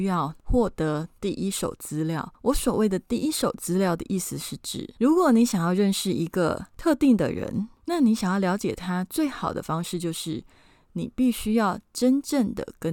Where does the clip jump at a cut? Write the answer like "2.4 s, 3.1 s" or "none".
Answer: none